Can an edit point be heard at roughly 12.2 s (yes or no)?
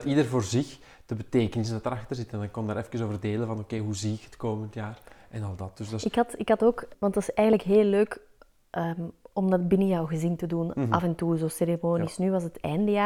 no